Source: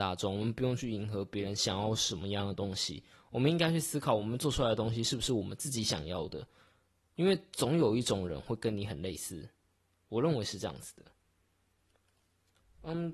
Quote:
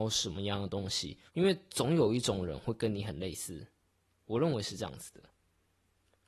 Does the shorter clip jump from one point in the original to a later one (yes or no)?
yes